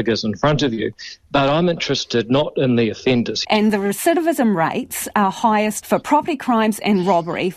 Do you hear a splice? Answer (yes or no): yes